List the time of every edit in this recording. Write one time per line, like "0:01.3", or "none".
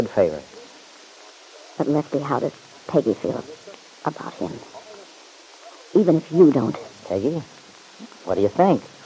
none